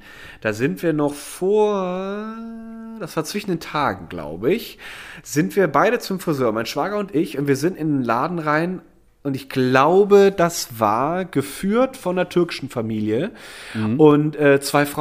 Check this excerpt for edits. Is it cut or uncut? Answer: uncut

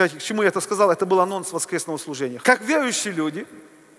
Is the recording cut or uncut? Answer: cut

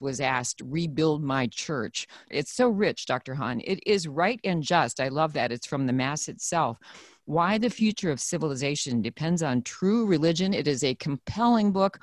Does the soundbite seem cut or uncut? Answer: cut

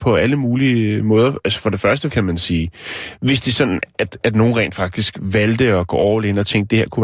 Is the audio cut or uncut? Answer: cut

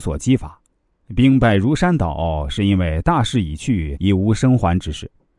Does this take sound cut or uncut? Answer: cut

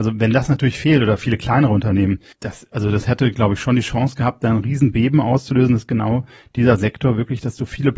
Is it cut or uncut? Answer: cut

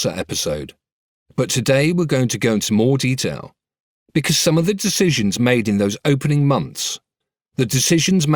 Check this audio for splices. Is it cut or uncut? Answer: uncut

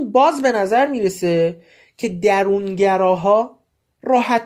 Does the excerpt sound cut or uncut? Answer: uncut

